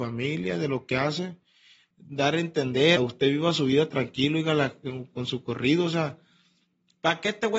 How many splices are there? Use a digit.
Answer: 2